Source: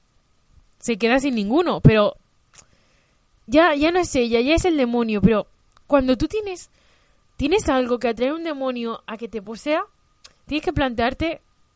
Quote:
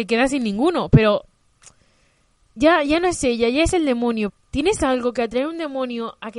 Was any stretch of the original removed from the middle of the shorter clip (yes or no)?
yes